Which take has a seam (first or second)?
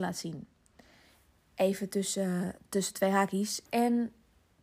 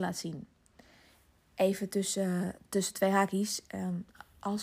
first